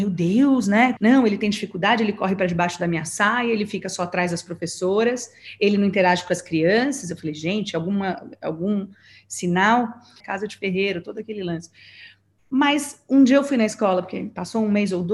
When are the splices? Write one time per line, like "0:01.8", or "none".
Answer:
0:01.0
0:10.2